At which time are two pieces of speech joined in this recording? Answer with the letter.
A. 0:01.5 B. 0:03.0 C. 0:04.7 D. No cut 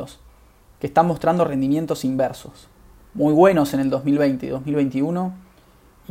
D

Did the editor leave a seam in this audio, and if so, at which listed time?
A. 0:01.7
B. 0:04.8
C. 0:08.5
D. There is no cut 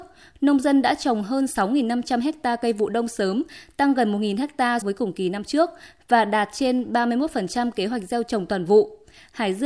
B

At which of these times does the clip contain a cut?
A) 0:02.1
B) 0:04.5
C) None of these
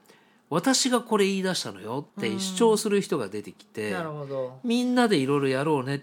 A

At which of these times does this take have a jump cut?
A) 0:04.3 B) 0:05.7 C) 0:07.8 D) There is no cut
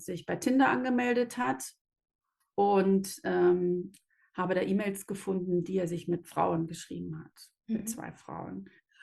D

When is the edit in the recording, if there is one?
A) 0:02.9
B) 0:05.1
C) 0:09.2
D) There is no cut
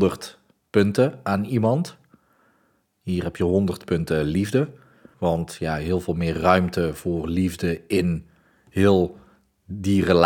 B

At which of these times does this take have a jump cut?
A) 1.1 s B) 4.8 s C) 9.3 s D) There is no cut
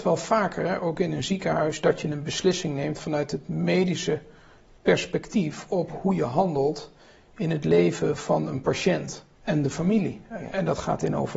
C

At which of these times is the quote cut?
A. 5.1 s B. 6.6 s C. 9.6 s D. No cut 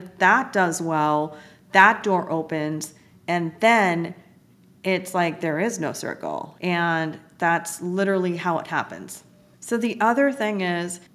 B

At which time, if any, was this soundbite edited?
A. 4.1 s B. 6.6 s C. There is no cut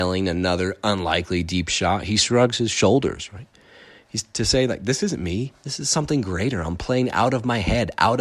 C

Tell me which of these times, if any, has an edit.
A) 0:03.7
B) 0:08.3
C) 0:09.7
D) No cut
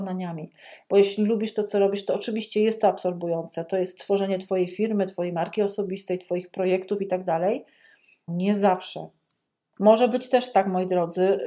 B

